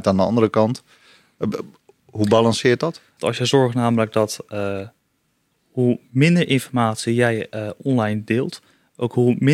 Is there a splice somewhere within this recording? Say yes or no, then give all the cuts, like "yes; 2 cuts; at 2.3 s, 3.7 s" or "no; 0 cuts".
yes; 1 cut; at 3.2 s